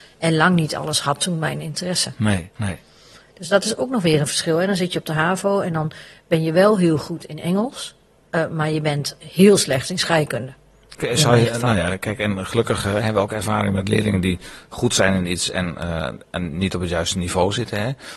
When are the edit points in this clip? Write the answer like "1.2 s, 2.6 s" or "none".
2.6 s